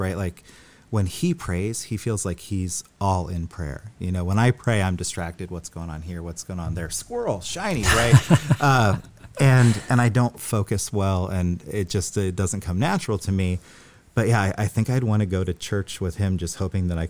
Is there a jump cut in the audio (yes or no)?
no